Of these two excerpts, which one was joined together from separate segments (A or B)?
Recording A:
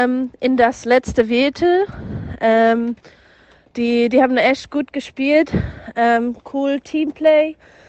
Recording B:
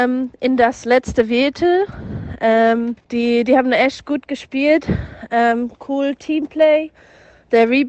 B